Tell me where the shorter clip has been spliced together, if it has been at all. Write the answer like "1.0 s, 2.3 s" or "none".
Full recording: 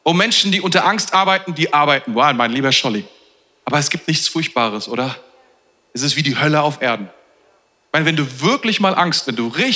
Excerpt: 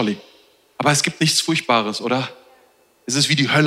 none